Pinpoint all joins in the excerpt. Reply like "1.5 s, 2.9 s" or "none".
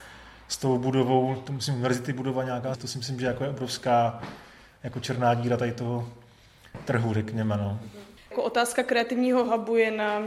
2.7 s